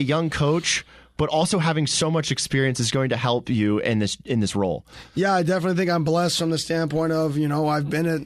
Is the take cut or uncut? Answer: uncut